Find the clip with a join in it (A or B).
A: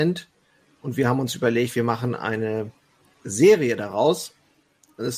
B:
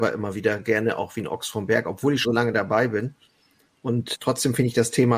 B